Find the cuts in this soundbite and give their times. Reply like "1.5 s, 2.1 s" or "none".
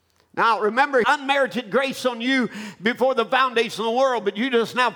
1.0 s